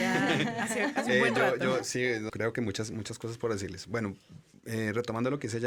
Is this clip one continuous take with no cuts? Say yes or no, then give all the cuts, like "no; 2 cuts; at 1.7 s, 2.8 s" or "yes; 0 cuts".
no; 1 cut; at 2.3 s